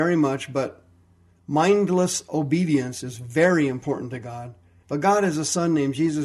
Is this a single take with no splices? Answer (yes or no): no